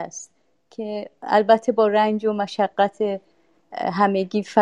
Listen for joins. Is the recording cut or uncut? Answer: uncut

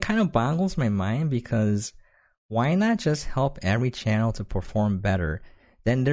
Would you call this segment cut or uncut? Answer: uncut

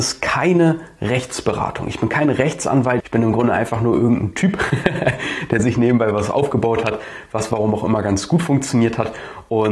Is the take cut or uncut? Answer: cut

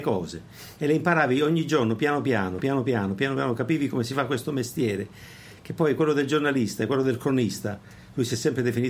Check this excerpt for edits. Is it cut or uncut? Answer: uncut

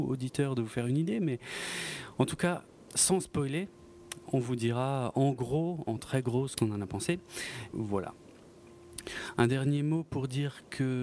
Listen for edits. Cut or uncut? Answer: cut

